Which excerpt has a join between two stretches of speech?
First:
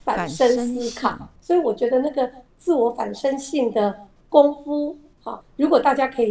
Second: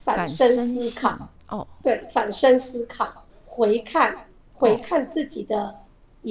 first; 2 cuts; at 1.4 s, 5.4 s

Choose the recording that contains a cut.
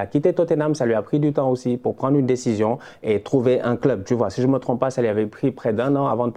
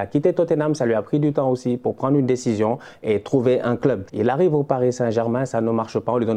second; 1 cut; at 4.1 s

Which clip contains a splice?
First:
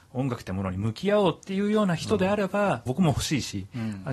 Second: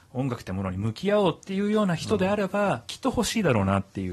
first; 1 cut; at 2.9 s

